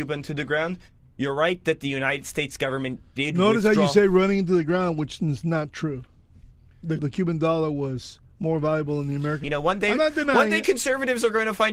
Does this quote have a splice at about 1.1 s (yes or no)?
no